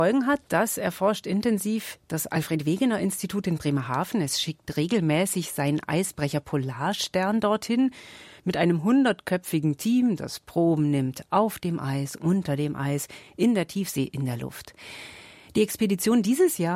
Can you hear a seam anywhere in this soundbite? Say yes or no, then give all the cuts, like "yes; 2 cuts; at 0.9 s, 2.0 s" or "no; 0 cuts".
no; 0 cuts